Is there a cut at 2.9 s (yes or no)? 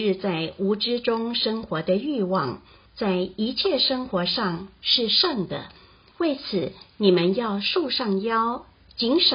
yes